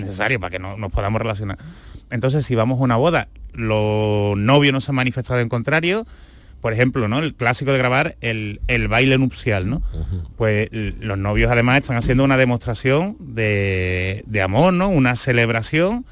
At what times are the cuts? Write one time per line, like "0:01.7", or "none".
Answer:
0:03.5